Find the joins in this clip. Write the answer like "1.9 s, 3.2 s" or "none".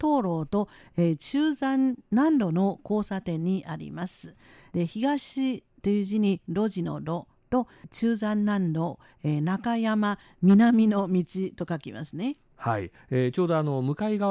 4.7 s

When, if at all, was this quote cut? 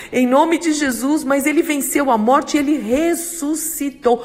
none

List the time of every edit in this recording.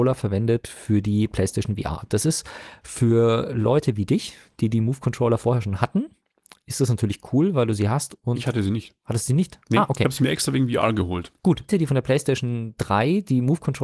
11.7 s

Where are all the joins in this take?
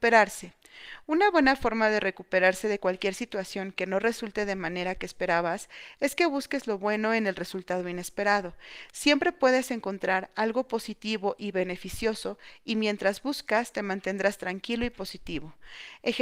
none

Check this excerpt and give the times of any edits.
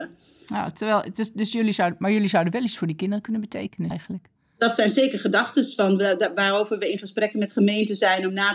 3.9 s

